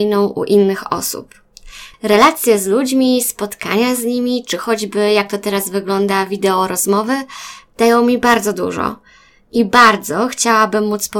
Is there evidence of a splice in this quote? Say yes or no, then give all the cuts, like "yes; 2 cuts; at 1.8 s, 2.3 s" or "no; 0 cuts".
yes; 1 cut; at 1.9 s